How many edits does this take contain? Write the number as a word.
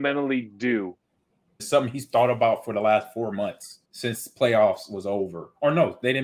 two